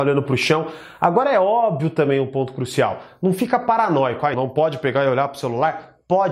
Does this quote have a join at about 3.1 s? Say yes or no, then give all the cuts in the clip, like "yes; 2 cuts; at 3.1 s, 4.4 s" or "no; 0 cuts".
no; 1 cut; at 4.3 s